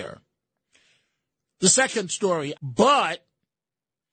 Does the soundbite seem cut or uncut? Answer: cut